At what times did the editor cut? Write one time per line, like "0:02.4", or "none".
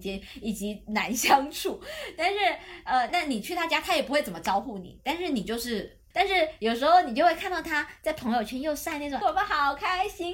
0:03.1
0:06.1
0:09.2